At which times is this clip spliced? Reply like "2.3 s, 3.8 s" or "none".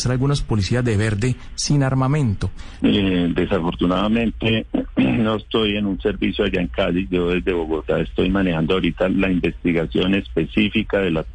2.8 s